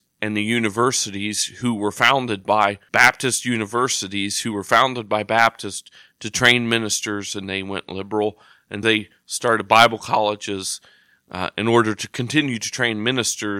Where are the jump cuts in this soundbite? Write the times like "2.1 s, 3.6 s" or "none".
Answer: 8.8 s